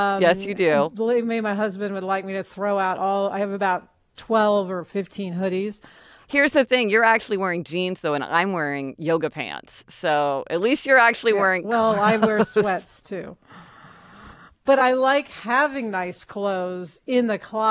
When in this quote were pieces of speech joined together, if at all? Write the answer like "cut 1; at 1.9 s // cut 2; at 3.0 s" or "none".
none